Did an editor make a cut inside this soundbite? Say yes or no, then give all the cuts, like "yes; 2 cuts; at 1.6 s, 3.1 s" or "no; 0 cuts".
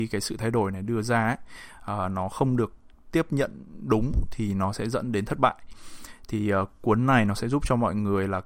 no; 0 cuts